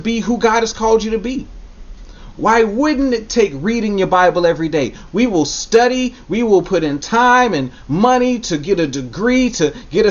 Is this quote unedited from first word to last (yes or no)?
no